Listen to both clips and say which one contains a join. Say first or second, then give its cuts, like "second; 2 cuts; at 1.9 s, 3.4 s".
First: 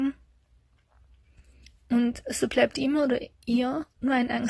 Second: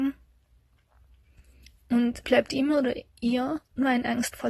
second; 1 cut; at 2.2 s